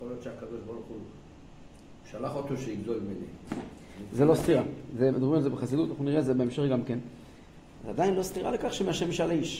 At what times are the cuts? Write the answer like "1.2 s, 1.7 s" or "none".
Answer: 5.1 s, 7.8 s